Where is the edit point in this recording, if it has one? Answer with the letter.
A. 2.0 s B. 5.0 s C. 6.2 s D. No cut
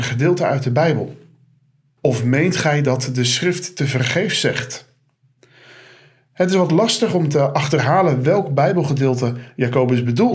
A